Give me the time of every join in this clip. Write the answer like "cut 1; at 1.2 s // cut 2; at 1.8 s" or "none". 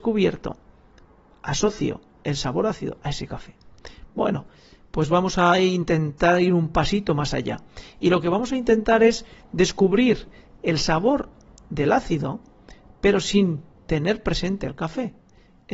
none